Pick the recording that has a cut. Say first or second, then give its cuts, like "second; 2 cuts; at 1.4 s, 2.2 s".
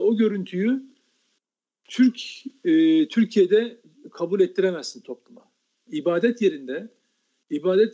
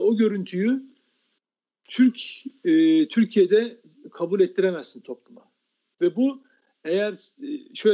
first; 1 cut; at 5.9 s